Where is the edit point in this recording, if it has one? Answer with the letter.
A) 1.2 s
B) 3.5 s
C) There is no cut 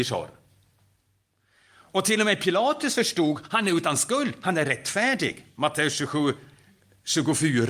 C